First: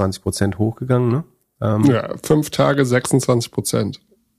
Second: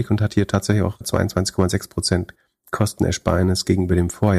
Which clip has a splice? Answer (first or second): second